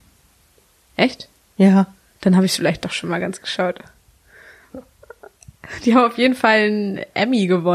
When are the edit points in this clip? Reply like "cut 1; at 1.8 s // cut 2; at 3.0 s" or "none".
none